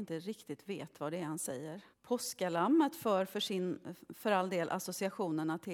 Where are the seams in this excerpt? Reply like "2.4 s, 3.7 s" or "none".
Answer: 1.9 s